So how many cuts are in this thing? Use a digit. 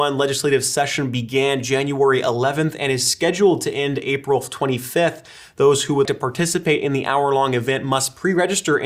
1